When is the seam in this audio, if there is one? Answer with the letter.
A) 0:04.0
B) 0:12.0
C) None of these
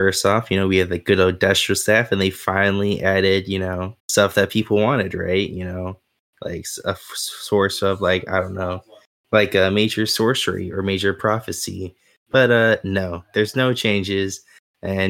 A